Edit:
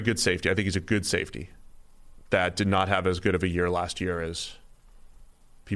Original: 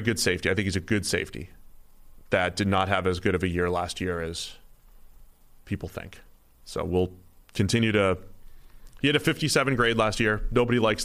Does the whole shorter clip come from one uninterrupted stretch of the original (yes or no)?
yes